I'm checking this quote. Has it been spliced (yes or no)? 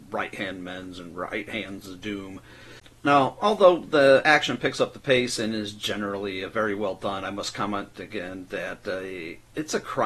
no